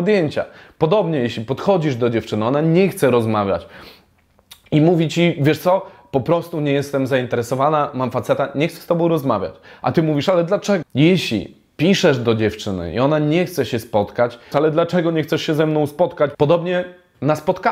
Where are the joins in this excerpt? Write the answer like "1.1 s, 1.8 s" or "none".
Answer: 10.8 s, 14.5 s, 16.3 s

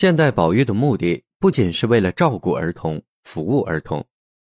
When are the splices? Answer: 1.5 s

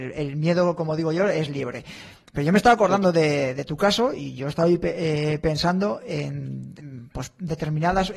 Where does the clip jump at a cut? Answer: none

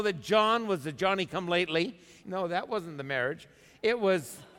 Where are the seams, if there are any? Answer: 2.2 s

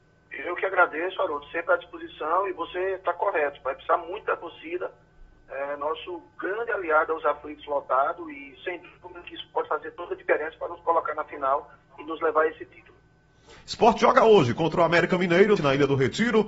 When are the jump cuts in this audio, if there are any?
13.6 s, 15.6 s

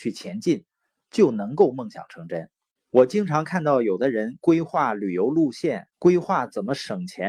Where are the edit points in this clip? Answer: 2.8 s, 5.9 s

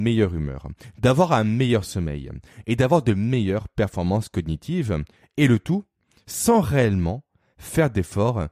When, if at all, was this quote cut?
none

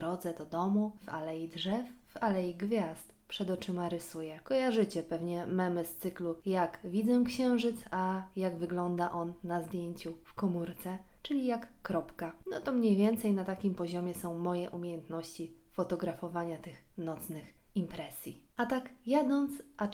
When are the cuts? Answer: 4.4 s

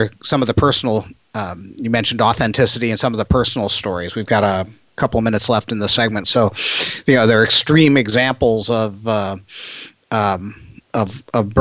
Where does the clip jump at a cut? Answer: 6.2 s

